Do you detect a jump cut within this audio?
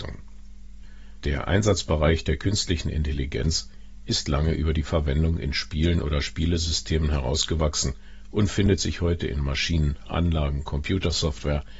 yes; 1 cut; at 1.2 s

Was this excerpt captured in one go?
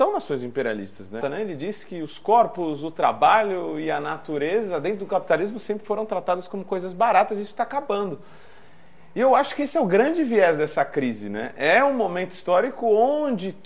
no; 1 cut; at 1.2 s

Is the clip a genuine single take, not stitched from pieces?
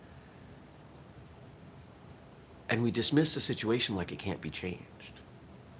yes; 0 cuts

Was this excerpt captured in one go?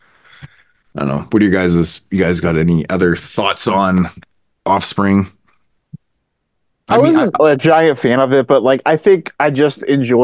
yes; 0 cuts

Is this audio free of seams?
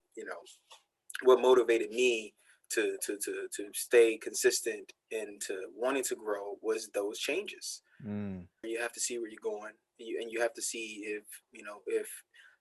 no; 2 cuts; at 8.6 s, 11.4 s

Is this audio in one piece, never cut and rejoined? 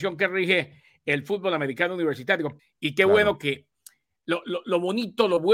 no; 1 cut; at 2.6 s

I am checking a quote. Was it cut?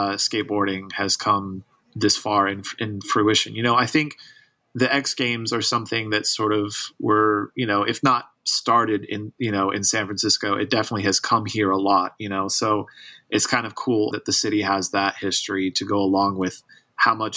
yes; 1 cut; at 14.1 s

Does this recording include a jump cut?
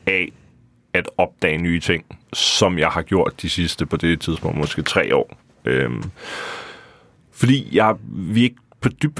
yes; 1 cut; at 2.2 s

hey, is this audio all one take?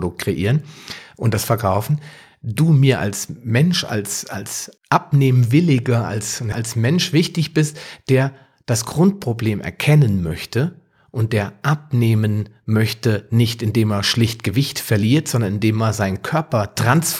no; 2 cuts; at 4.8 s, 6.5 s

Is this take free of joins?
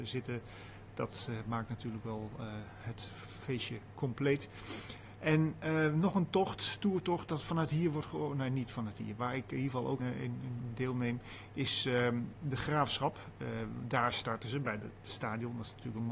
no; 1 cut; at 10.0 s

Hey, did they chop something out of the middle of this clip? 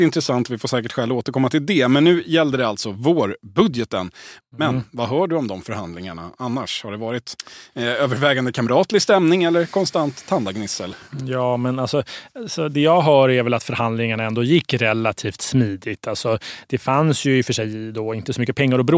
yes; 1 cut; at 4.4 s

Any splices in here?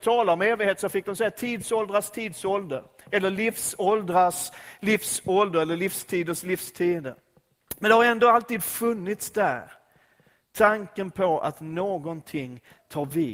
no; 0 cuts

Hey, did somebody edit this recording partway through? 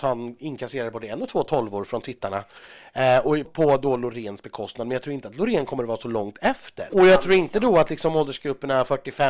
yes; 2 cuts; at 3.4 s, 6.9 s

